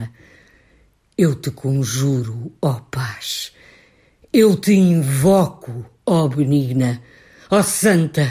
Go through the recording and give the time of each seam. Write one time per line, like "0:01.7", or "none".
none